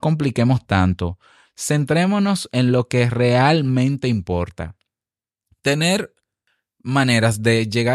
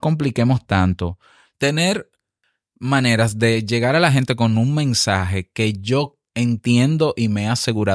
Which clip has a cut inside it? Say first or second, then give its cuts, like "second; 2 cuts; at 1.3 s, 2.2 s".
second; 1 cut; at 1.5 s